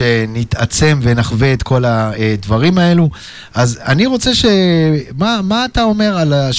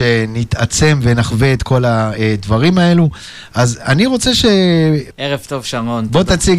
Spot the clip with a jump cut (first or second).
second